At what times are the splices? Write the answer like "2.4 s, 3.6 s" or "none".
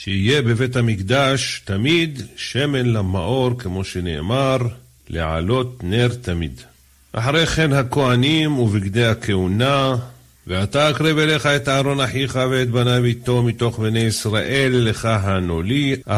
none